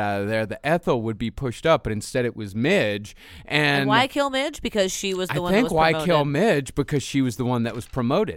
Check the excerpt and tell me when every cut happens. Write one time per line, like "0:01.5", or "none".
none